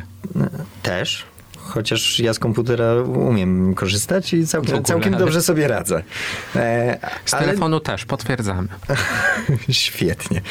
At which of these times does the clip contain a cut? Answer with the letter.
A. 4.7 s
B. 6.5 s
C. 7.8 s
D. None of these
A